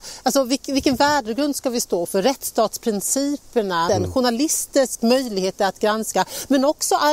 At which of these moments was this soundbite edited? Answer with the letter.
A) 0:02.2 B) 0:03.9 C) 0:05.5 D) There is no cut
B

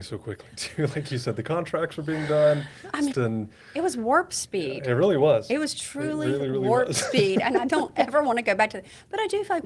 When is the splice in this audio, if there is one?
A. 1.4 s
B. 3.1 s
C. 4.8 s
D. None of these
B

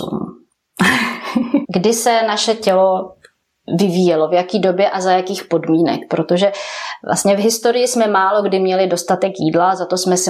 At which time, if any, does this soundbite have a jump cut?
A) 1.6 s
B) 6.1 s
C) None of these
A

